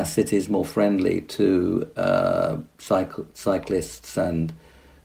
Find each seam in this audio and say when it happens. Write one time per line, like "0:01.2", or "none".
none